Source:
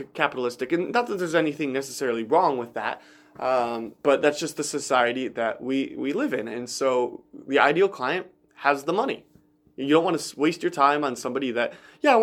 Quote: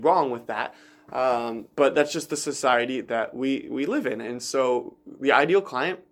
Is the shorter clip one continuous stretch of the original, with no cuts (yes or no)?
yes